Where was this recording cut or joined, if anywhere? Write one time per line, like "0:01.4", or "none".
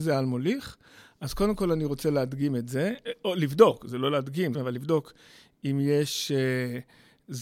0:04.5